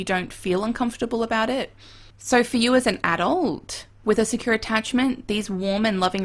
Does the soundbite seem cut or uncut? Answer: cut